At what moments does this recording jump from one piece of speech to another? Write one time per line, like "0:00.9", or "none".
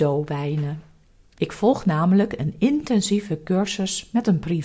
0:01.4